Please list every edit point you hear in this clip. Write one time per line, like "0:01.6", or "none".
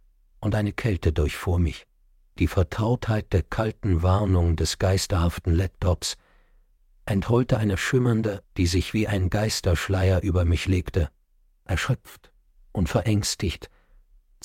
0:08.4